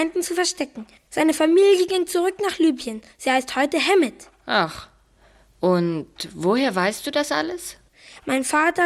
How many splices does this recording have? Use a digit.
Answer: 1